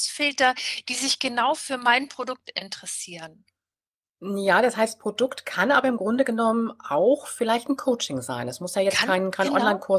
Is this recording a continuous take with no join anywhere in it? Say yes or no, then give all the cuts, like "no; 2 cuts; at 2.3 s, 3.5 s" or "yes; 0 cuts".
yes; 0 cuts